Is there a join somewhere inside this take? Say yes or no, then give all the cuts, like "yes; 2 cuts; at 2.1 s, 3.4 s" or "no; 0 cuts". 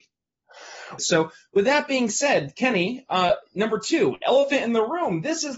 yes; 1 cut; at 1.0 s